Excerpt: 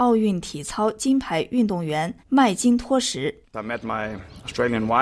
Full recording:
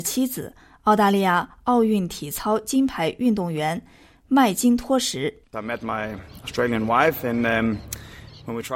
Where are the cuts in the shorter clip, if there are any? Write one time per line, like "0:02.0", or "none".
0:02.2